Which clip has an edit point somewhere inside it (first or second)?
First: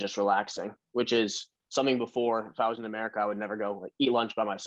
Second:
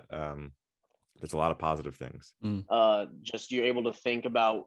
second